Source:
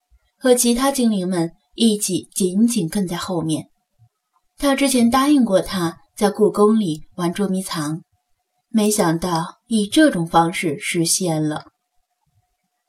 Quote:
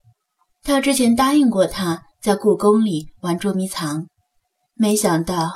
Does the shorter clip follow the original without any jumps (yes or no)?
yes